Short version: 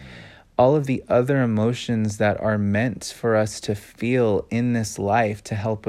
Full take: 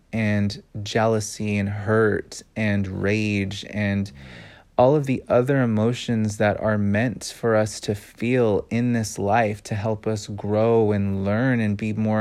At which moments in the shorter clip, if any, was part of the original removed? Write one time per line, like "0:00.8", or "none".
none